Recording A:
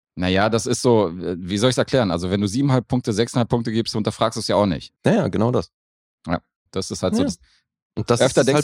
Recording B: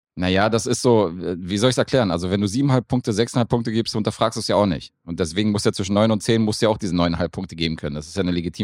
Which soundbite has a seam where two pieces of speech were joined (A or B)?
A